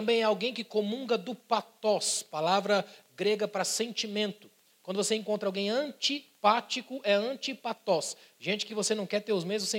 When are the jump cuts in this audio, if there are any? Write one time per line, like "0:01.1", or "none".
none